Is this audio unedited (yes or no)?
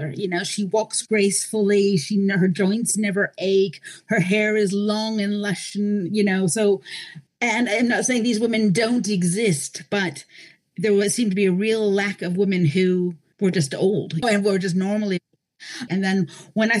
no